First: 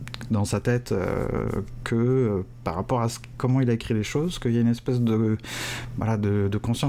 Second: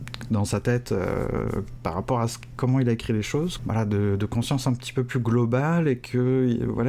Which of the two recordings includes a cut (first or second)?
second